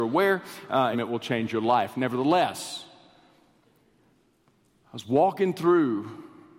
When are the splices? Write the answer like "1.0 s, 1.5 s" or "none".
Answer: 0.9 s